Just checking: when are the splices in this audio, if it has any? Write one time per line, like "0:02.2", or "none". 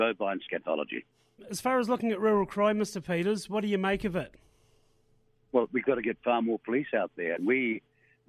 none

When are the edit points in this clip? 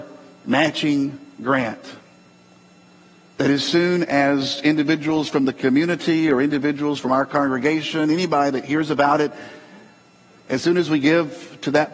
none

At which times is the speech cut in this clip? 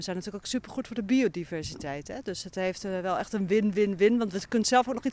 none

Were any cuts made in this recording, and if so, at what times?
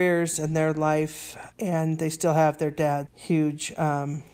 0:01.5
0:03.1

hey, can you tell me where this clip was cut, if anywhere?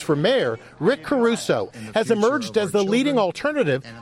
0:01.7

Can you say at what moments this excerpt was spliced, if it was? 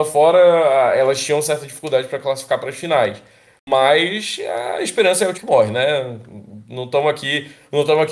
0:05.3

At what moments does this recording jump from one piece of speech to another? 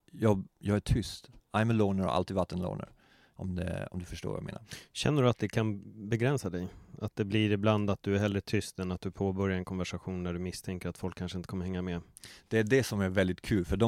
0:01.4
0:03.3

